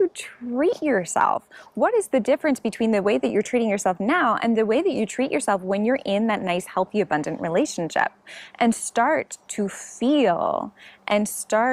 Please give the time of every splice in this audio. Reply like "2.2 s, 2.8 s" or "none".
none